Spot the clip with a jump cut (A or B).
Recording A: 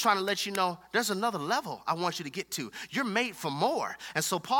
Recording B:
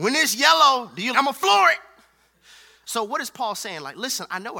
B